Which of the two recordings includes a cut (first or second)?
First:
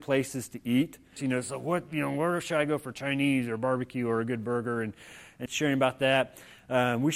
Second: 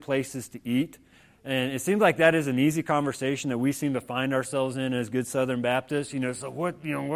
first